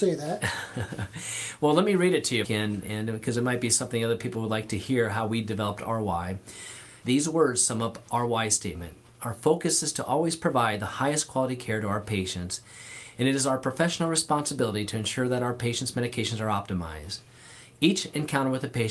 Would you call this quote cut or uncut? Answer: cut